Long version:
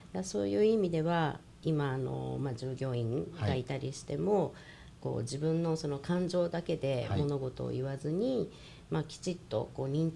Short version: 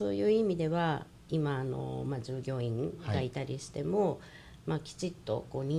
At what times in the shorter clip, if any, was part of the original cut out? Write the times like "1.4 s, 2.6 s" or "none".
4.6 s

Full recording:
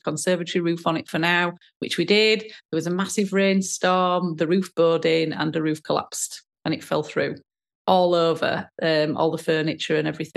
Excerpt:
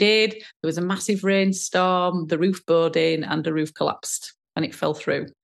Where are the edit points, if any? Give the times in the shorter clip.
none

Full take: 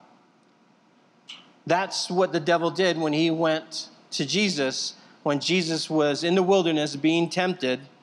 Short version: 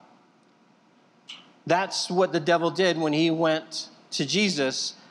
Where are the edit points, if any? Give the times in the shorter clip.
none

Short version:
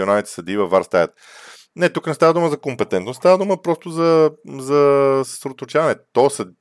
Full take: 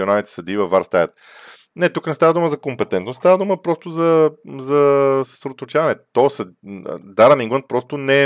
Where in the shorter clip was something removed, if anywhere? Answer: none

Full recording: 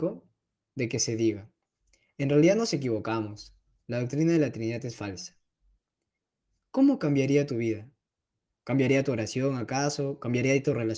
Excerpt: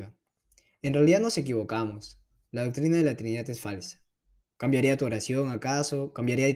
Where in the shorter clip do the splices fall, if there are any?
4.5 s

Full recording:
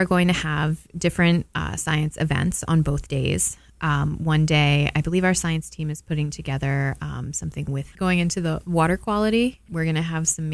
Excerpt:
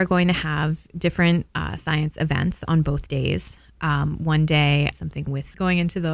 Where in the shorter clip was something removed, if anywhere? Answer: 4.9 s

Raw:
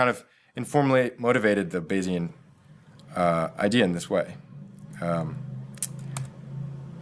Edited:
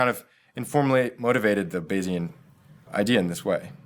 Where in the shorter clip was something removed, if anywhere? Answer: 2.9 s

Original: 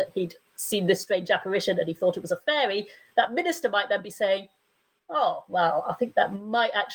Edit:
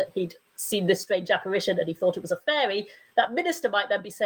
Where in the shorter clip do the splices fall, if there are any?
none

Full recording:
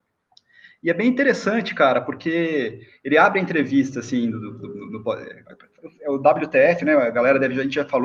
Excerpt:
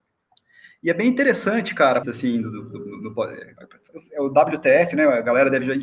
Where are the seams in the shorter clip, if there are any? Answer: 2.0 s

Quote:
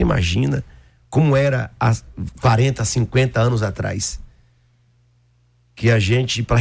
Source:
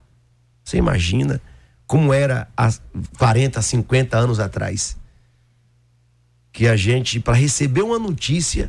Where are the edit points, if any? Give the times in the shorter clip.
none

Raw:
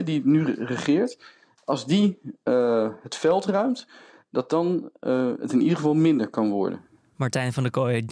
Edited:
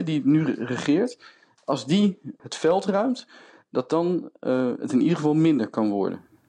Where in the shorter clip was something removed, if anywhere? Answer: 2.4 s

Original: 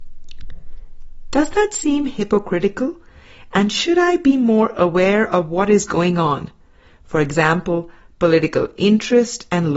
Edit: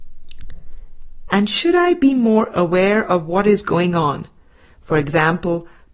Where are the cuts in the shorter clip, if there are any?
1.3 s

